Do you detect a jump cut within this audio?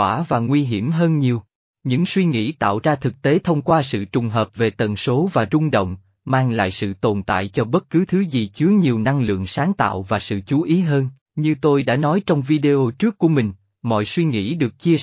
yes; 2 cuts; at 1.7 s, 11.2 s

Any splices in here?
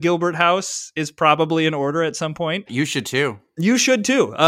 yes; 1 cut; at 2.7 s

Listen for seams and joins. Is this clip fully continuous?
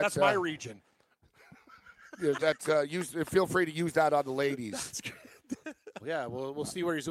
no; 2 cuts; at 2.4 s, 6.0 s

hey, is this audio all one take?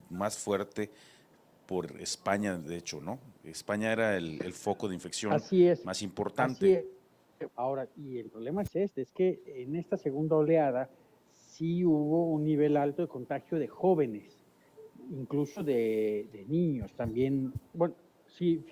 no; 2 cuts; at 7.5 s, 17.7 s

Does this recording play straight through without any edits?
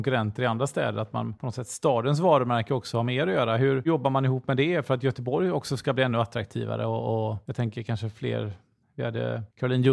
yes; 0 cuts

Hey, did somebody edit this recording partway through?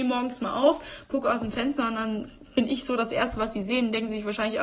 no; 0 cuts

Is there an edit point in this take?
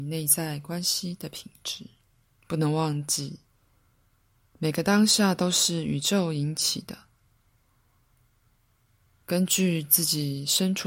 yes; 1 cut; at 2.4 s

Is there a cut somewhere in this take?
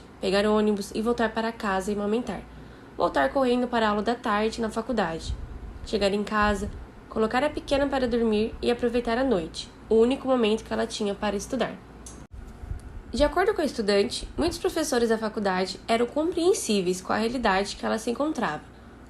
no; 0 cuts

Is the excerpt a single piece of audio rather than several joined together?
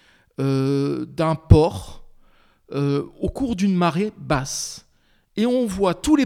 yes; 0 cuts

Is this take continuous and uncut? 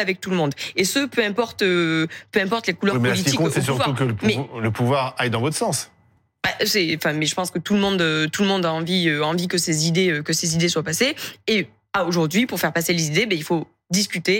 yes; 0 cuts

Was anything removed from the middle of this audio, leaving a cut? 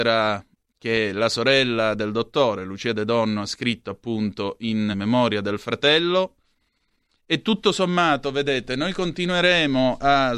yes; 1 cut; at 4.9 s

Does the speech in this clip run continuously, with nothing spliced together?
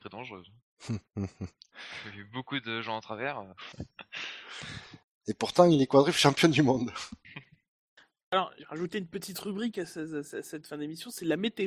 no; 1 cut; at 3.7 s

